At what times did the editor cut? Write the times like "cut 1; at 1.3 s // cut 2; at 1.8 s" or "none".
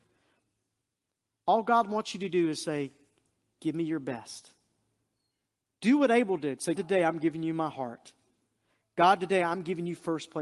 cut 1; at 6.7 s